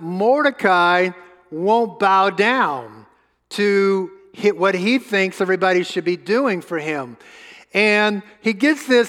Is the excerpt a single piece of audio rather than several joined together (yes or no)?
yes